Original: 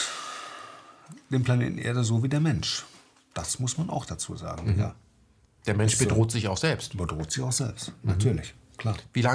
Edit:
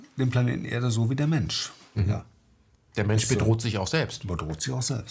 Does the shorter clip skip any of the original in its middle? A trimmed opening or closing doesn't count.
yes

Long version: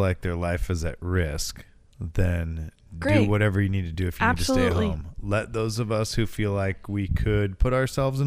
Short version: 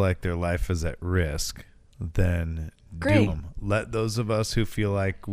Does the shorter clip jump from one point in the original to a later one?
yes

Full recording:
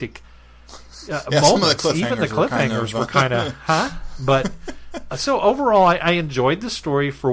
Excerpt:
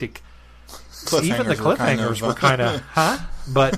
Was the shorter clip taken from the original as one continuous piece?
no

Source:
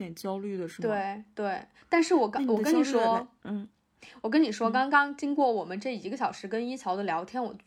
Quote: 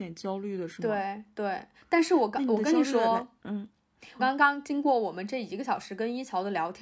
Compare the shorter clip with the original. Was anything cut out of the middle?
yes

